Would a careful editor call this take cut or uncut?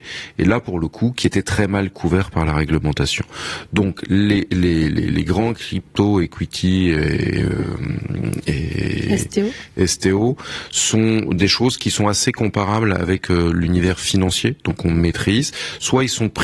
uncut